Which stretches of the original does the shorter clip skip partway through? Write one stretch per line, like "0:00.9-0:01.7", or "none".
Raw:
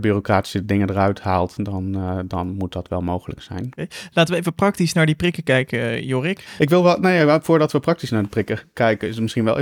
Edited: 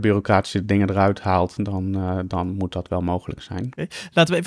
none